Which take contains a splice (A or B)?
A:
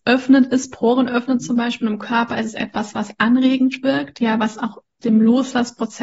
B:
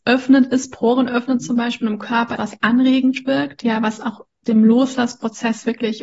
B